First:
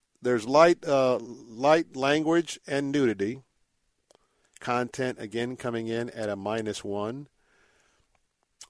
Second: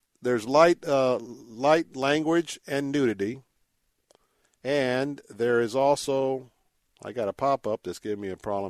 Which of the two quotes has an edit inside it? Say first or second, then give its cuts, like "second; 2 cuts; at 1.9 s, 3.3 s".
first; 1 cut; at 4.5 s